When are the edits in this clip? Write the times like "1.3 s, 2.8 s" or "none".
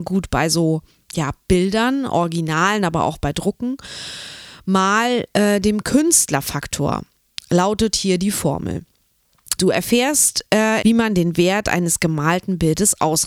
9.6 s, 10.8 s